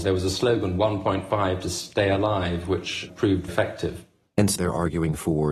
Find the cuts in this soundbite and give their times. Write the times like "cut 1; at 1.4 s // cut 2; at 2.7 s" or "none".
cut 1; at 3.5 s // cut 2; at 4.6 s